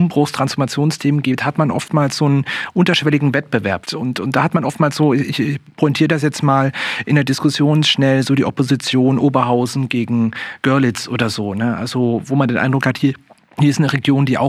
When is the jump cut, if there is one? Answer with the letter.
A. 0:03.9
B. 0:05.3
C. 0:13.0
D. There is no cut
A